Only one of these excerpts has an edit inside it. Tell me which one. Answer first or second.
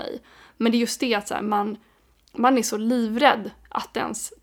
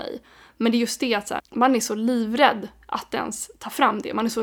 second